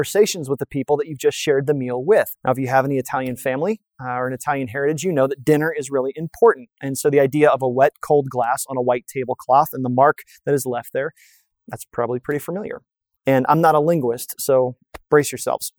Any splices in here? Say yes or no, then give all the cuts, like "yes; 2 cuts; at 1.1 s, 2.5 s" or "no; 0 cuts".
yes; 2 cuts; at 2.4 s, 13.2 s